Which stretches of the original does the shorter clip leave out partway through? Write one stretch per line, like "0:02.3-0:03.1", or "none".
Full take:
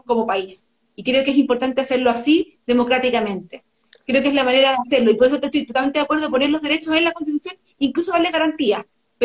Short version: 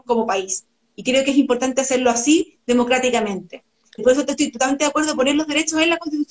0:04.0-0:05.1